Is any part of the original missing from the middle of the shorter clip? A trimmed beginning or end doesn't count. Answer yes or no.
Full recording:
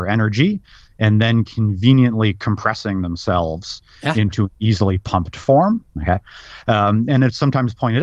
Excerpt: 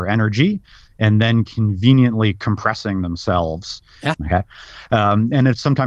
yes